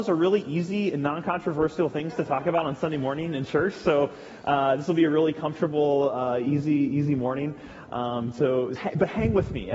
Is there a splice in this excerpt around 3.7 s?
no; 1 cut; at 8.8 s

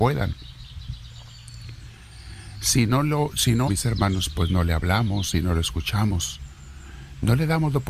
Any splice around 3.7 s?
yes; 1 cut; at 3.7 s

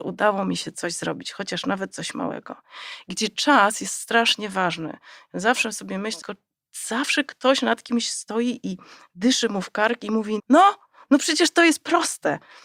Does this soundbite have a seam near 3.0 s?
no; 2 cuts; at 6.2 s, 10.4 s

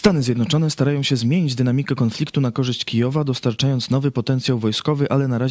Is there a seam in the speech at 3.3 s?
no; 0 cuts

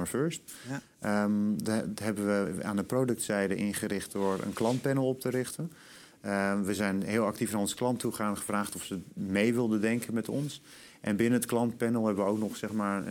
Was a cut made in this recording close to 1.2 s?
no; 0 cuts

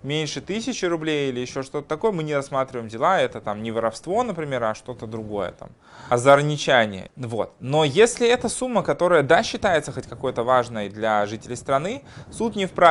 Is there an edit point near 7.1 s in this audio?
yes; 1 cut; at 7.1 s

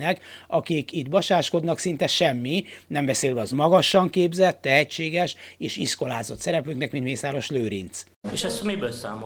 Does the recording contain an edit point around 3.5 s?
yes; 1 cut; at 3.5 s

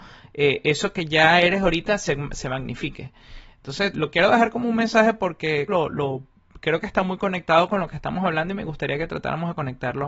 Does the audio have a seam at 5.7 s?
yes; 2 cuts; at 3.9 s, 5.7 s

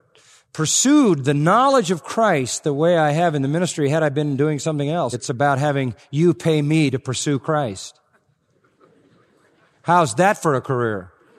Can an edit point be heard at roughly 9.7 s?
no; 1 cut; at 5.1 s

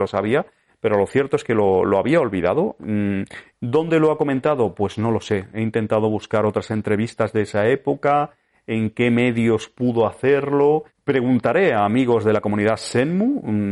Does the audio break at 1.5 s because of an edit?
no; 2 cuts; at 3.5 s, 10.9 s

